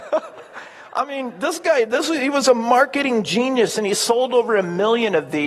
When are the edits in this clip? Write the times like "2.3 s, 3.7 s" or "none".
none